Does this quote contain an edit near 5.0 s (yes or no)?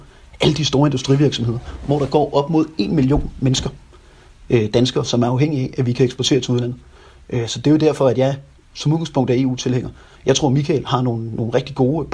no